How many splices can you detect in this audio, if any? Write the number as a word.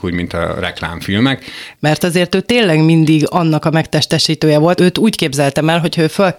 two